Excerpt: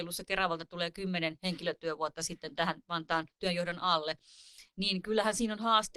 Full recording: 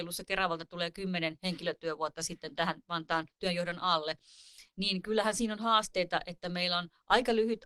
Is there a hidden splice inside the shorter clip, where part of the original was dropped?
no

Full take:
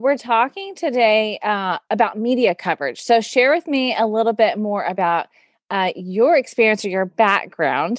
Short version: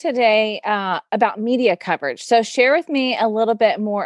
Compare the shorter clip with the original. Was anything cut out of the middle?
no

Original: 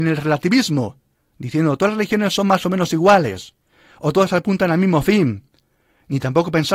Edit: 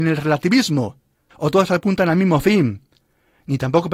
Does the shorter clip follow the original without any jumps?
no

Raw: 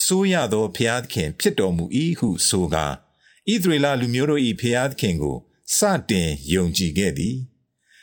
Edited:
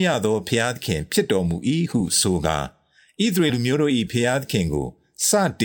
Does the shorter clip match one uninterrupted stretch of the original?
no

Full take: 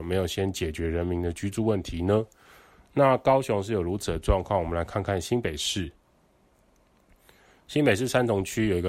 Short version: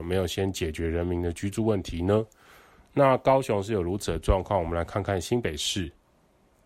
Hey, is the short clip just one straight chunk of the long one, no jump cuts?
yes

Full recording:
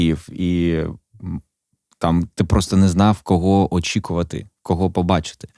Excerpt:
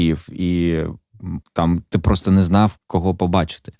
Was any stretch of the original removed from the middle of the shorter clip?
yes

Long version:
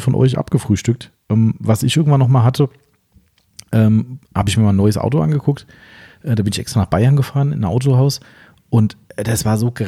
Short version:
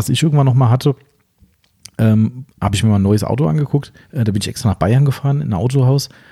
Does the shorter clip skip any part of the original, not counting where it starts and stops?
yes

